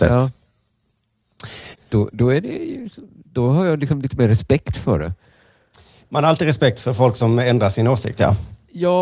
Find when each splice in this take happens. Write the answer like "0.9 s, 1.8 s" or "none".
1.7 s